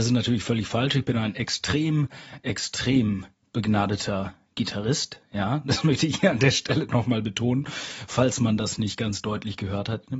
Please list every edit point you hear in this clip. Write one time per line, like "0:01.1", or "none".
none